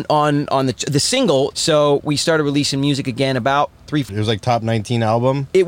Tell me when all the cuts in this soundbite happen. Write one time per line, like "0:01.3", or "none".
0:01.5
0:04.1